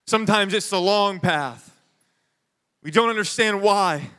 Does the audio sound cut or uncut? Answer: uncut